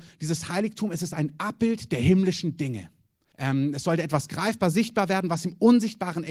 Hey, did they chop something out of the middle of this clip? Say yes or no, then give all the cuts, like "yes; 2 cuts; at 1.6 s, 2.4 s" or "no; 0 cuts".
yes; 1 cut; at 3.3 s